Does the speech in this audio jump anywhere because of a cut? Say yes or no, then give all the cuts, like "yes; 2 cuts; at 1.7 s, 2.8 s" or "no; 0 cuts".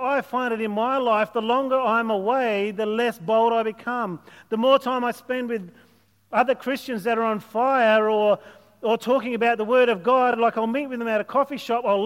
no; 0 cuts